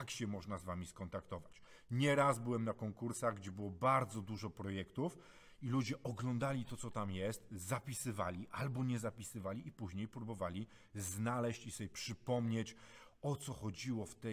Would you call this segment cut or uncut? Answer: uncut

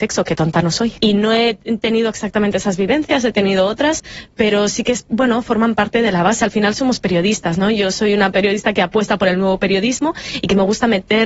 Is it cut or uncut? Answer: cut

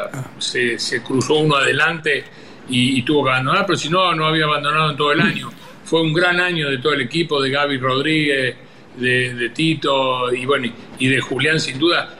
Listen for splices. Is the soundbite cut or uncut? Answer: uncut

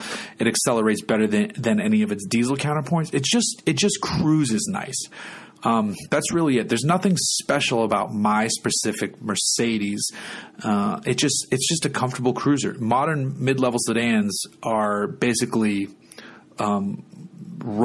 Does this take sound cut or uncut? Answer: uncut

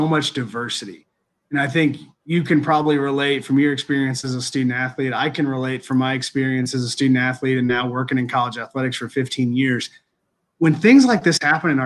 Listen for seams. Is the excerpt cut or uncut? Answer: uncut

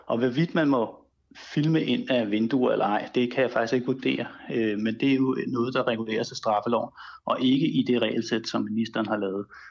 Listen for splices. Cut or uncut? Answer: uncut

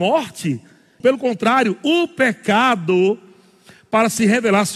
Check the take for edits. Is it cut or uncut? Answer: cut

